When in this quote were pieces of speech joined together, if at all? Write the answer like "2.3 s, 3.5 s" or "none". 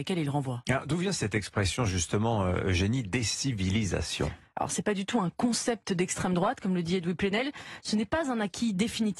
7.8 s